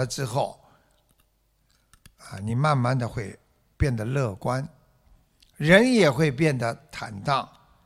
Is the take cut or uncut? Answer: uncut